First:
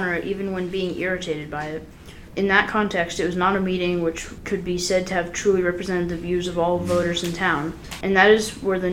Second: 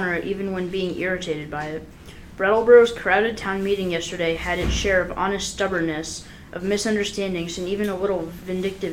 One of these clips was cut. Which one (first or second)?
first